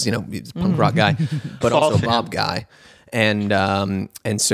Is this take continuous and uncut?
no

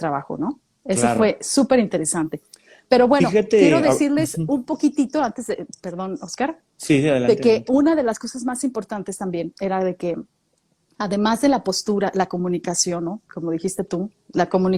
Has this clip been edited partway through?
no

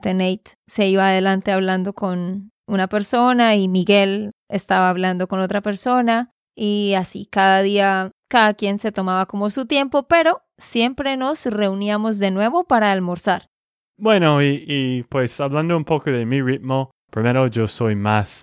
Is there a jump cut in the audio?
no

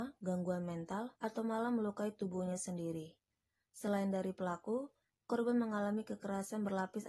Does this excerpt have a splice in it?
yes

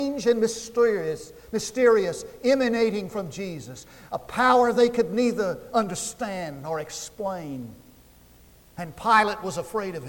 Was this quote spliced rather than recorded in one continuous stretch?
no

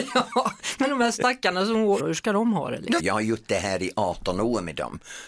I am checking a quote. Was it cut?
yes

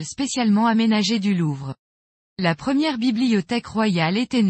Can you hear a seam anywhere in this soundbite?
no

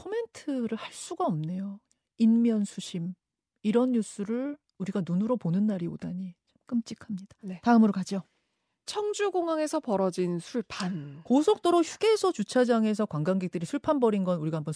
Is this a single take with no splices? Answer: yes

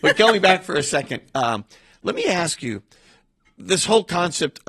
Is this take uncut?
yes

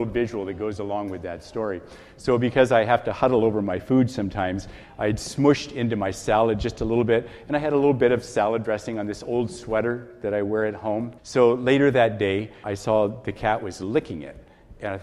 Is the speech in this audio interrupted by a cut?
yes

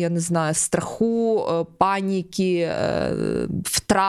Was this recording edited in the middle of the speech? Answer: no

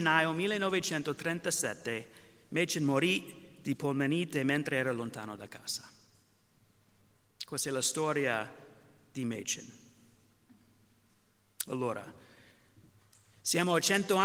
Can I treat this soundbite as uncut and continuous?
yes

